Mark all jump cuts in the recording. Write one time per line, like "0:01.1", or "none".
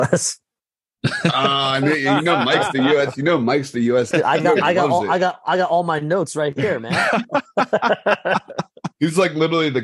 0:04.1